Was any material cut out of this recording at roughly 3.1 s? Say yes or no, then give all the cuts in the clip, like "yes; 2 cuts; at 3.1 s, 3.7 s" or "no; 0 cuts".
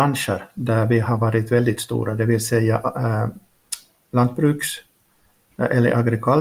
no; 0 cuts